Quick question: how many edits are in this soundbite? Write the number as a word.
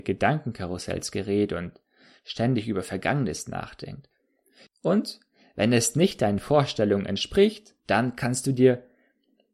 two